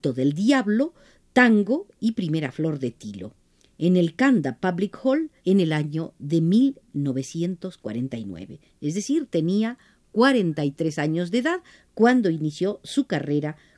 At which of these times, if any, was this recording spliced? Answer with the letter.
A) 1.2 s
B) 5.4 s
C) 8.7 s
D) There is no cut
B